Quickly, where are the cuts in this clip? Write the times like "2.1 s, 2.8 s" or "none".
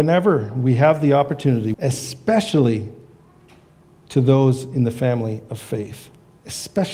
1.7 s